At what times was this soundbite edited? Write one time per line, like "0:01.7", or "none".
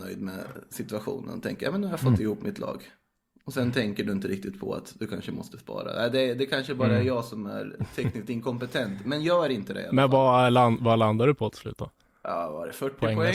none